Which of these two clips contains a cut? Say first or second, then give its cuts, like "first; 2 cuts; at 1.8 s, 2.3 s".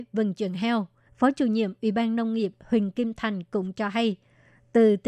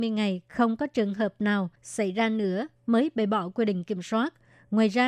first; 1 cut; at 1.1 s